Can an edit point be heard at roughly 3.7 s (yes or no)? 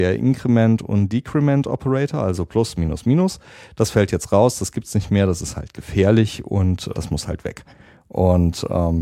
no